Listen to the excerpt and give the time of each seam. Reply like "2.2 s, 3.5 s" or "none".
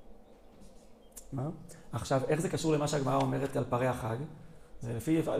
none